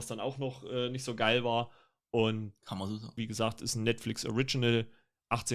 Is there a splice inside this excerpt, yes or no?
yes